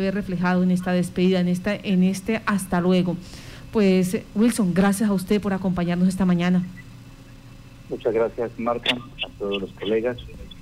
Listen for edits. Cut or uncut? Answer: uncut